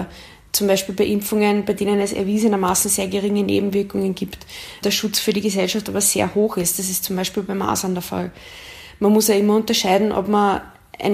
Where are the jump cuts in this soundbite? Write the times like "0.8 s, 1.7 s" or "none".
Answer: none